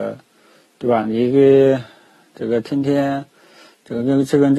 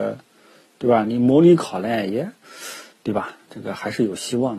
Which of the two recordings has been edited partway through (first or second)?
second